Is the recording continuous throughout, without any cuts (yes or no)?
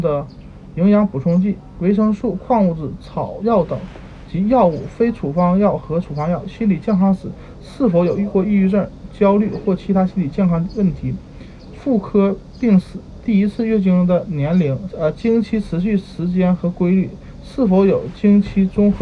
no